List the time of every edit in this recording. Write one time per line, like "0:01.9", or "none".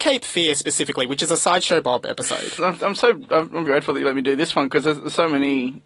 0:02.6
0:03.7